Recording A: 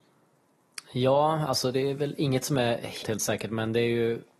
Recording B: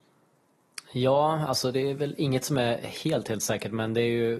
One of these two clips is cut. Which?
A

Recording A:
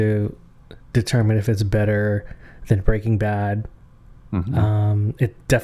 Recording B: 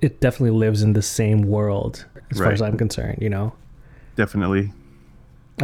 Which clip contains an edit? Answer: B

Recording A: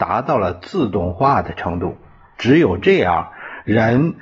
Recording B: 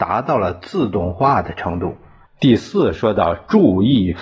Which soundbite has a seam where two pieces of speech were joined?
B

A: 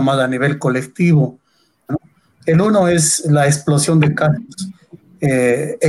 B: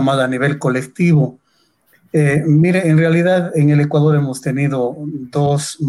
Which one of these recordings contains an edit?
A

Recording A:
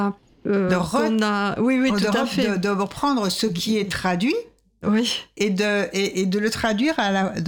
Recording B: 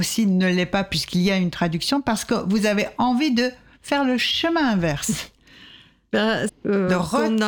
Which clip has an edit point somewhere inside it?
B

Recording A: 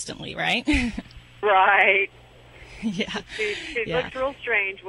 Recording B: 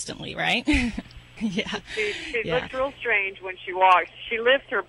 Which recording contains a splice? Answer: B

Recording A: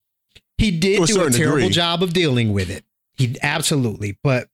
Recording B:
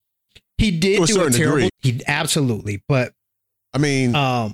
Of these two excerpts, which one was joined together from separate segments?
B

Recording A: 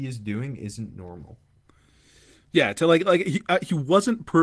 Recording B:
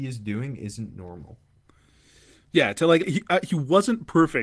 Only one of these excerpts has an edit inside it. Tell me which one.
B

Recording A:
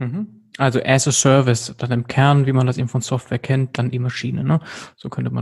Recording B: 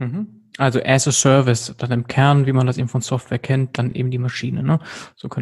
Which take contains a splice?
A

